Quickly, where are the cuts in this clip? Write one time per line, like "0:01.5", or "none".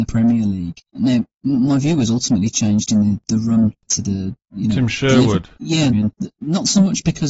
0:05.9